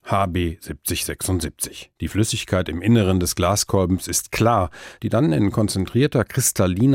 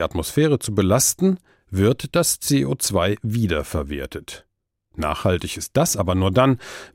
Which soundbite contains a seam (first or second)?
first